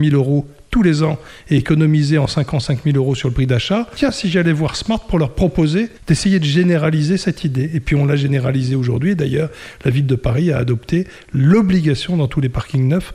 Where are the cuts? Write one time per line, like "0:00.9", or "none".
none